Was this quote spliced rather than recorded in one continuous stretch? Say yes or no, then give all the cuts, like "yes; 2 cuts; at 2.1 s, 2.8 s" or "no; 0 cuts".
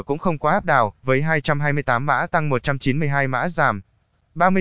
no; 0 cuts